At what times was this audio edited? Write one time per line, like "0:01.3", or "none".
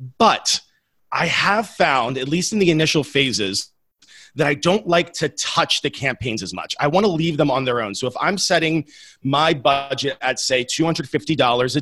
none